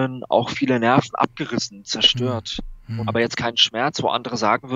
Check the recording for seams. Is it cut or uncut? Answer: cut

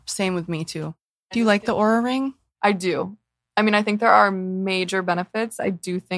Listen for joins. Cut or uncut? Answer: uncut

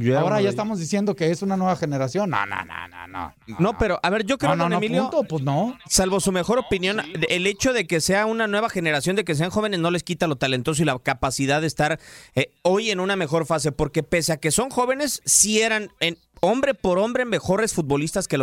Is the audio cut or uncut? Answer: uncut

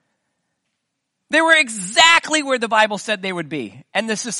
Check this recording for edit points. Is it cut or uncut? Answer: uncut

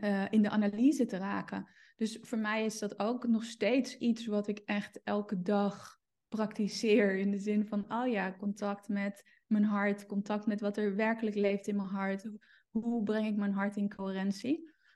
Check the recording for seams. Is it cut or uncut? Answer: uncut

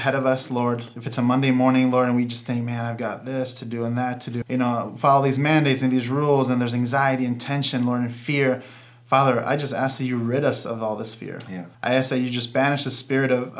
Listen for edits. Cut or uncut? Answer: cut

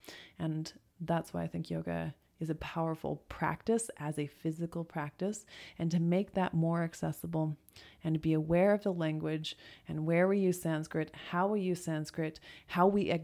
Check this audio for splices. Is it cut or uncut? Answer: uncut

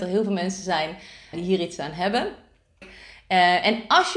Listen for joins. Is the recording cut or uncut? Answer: cut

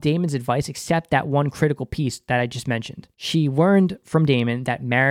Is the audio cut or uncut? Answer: cut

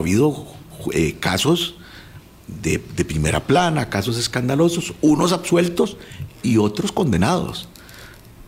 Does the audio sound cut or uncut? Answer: uncut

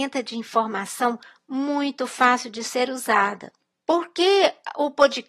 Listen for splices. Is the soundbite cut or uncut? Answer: uncut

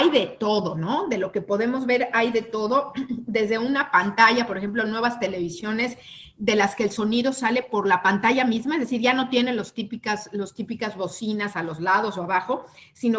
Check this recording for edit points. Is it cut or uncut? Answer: uncut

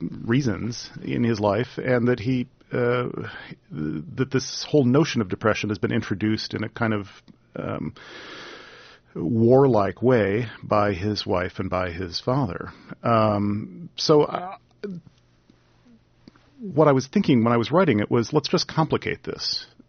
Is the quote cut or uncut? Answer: uncut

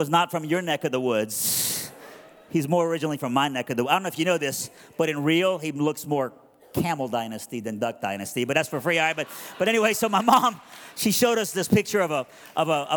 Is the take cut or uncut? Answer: uncut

